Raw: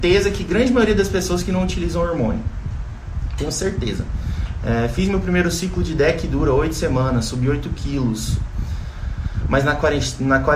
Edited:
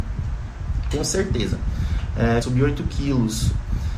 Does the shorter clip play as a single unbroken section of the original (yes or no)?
no